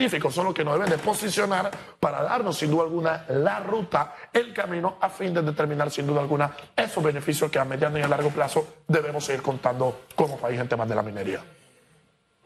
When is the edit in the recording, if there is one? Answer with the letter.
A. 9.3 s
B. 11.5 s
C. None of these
C